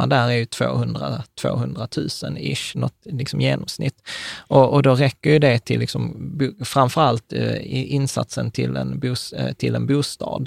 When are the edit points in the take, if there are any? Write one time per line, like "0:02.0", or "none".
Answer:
none